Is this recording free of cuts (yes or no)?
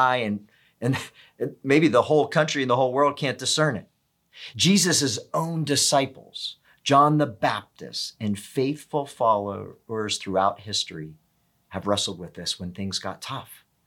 yes